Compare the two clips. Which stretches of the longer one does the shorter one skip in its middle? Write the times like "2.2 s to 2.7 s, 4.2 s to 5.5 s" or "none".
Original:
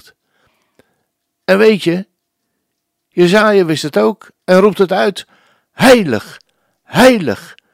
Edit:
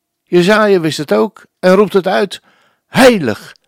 none